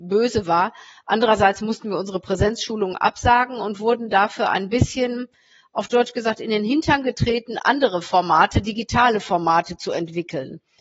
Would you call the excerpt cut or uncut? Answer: uncut